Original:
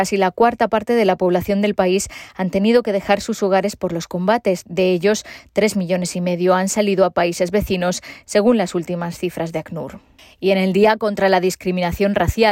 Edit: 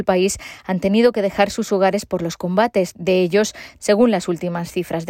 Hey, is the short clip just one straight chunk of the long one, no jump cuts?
no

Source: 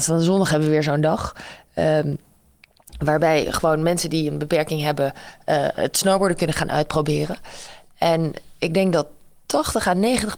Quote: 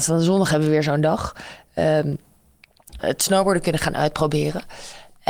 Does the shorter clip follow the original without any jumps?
no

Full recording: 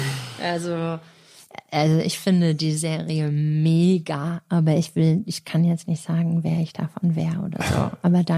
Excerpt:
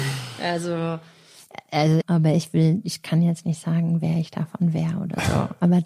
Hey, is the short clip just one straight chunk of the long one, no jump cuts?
no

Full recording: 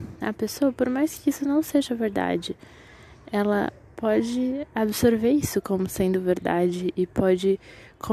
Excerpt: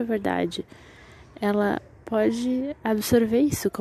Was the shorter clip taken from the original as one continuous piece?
yes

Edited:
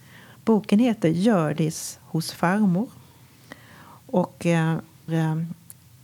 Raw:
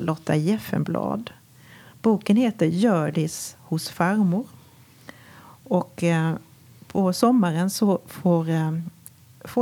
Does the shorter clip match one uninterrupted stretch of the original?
no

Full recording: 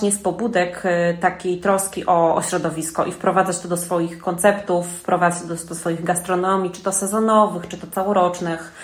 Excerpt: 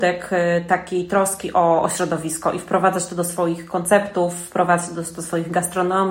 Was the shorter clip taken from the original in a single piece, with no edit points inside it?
yes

